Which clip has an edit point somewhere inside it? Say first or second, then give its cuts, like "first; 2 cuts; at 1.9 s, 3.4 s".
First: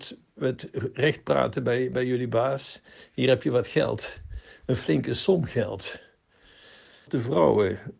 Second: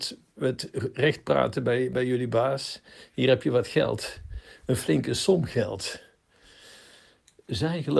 first; 1 cut; at 7.1 s